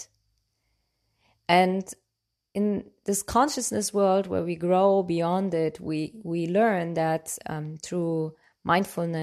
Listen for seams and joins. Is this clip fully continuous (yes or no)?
yes